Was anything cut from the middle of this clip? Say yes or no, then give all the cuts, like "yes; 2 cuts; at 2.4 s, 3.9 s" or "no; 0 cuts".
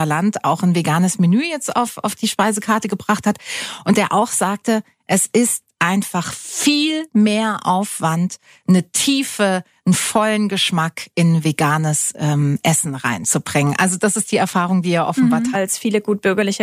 yes; 1 cut; at 15.5 s